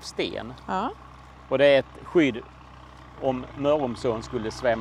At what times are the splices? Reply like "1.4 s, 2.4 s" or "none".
none